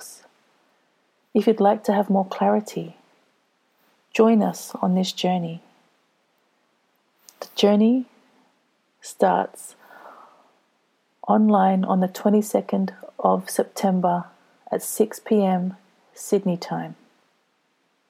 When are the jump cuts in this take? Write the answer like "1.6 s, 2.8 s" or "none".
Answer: none